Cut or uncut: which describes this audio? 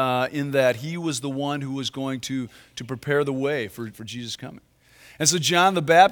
cut